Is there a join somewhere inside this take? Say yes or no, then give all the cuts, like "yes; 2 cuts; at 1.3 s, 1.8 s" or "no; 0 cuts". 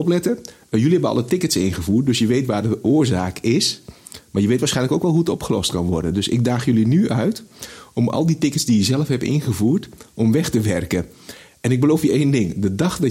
no; 0 cuts